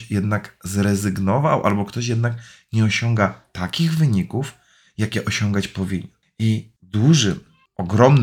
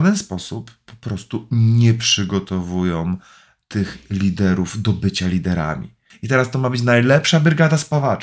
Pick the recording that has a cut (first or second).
second